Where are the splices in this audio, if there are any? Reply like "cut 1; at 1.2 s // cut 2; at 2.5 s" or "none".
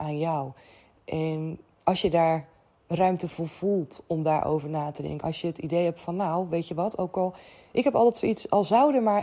cut 1; at 5.2 s